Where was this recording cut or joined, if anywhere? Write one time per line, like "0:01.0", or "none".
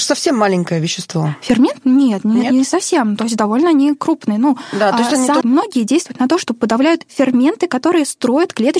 0:05.4